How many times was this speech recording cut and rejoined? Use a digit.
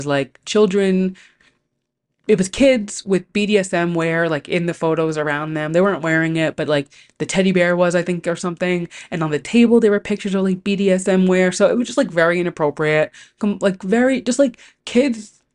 0